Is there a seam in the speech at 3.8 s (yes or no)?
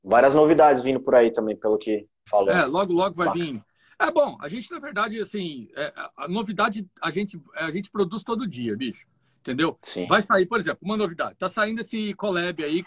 no